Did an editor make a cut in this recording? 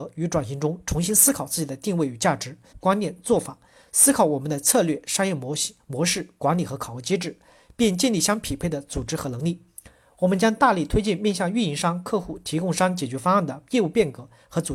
yes; 1 cut; at 2.7 s

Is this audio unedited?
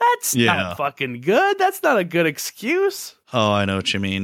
no; 1 cut; at 3.2 s

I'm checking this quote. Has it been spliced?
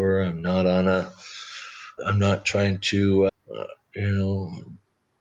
yes; 2 cuts; at 2.0 s, 3.3 s

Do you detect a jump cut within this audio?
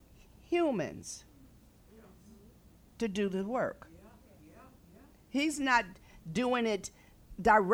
no; 0 cuts

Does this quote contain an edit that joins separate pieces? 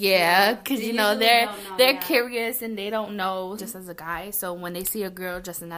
yes; 1 cut; at 3.6 s

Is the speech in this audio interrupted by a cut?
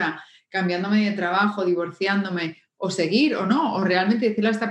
no; 0 cuts

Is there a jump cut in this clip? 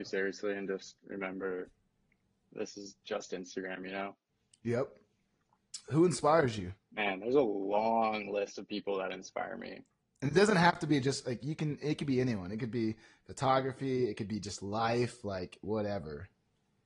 yes; 1 cut; at 6.8 s

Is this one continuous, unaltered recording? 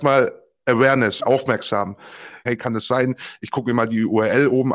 no; 2 cuts; at 1.2 s, 2.5 s

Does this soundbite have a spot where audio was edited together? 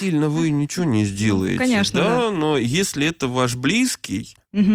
no; 0 cuts

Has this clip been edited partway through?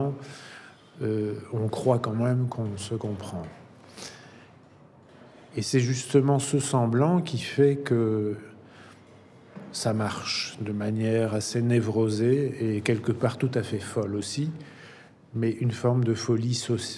no; 0 cuts

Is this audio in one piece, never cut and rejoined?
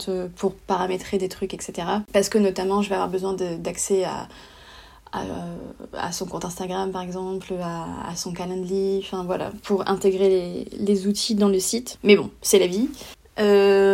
no; 1 cut; at 11.9 s

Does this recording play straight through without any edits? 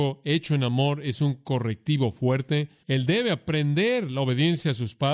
no; 1 cut; at 2.8 s

